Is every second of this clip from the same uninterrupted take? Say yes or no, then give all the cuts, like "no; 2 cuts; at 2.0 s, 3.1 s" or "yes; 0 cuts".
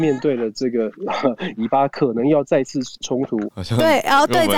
no; 2 cuts; at 1.6 s, 3.4 s